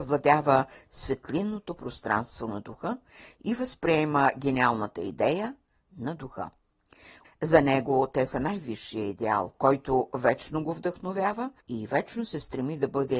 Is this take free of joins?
no; 3 cuts; at 7.2 s, 9.5 s, 11.6 s

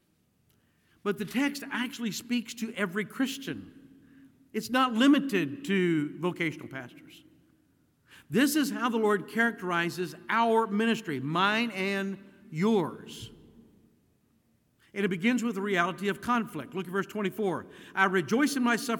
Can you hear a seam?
no; 0 cuts

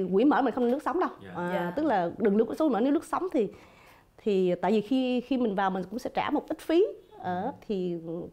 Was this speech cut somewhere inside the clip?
no; 0 cuts

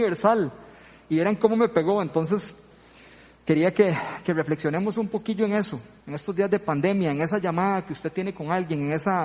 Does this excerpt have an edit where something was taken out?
yes; 1 cut; at 6.0 s

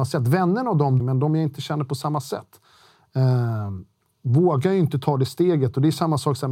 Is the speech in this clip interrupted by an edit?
yes; 1 cut; at 1.0 s

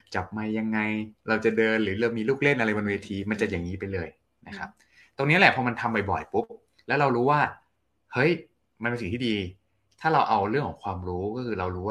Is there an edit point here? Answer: no; 0 cuts

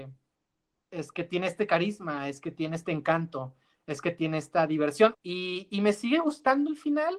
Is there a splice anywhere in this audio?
yes; 1 cut; at 5.1 s

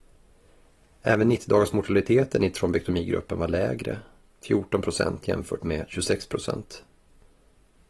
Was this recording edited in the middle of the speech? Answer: no; 0 cuts

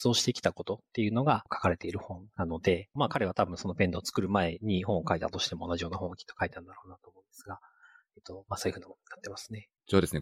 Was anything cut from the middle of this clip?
no; 0 cuts

